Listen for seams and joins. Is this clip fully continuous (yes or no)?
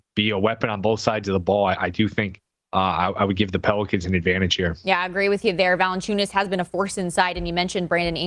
yes